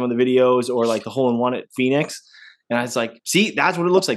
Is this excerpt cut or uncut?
uncut